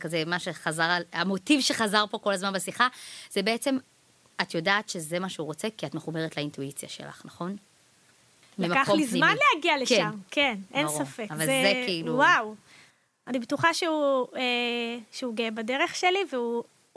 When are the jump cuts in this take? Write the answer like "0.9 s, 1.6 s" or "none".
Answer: none